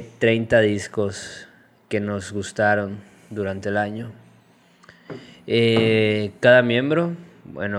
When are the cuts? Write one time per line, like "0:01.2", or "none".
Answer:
none

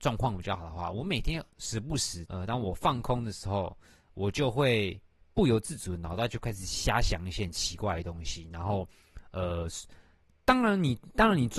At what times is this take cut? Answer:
0:02.3

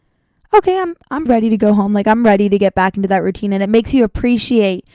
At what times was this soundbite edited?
0:01.3

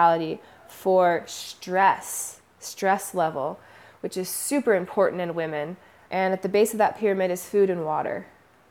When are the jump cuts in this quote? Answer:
0:06.0

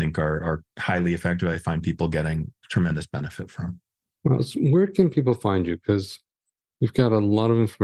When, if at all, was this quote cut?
none

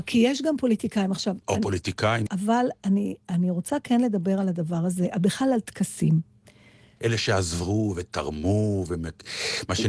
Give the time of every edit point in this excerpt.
0:02.3
0:07.0

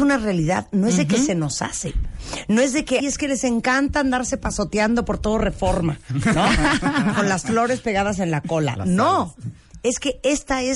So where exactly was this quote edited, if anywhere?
0:03.0

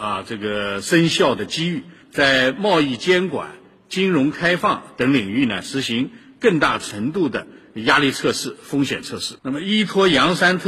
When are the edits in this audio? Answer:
0:09.4

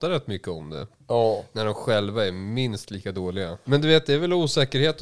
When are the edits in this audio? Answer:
0:01.1
0:03.6

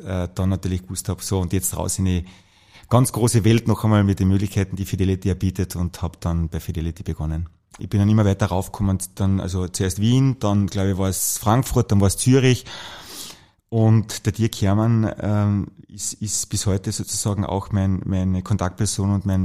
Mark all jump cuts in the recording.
0:07.8

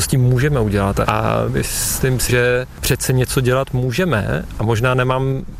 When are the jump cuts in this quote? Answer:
0:02.3

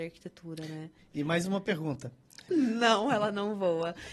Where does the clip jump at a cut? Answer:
0:01.0
0:02.5

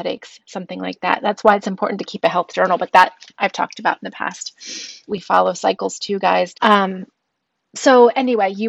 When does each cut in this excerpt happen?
0:05.1
0:06.5

